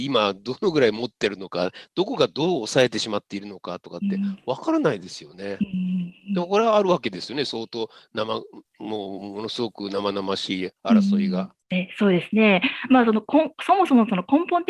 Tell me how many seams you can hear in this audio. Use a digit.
0